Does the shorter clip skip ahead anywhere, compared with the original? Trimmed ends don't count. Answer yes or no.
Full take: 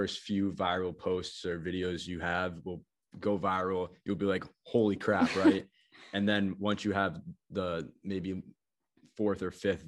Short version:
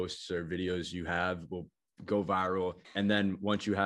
yes